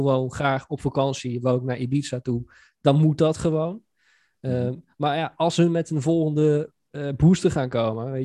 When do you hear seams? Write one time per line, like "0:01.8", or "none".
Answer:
none